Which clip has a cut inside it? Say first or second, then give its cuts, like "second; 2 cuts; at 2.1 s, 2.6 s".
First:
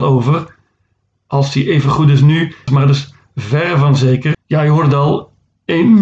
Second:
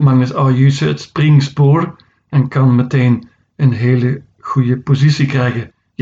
first; 2 cuts; at 2.7 s, 4.3 s